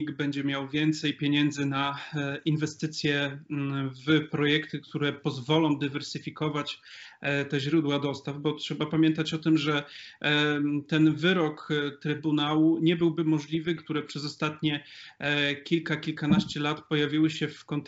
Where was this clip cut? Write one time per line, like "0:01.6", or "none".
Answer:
0:13.8

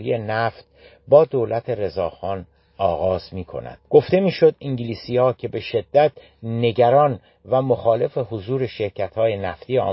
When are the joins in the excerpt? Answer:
0:03.8

